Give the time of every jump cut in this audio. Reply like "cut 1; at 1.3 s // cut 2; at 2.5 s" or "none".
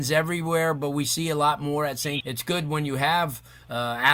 cut 1; at 2.2 s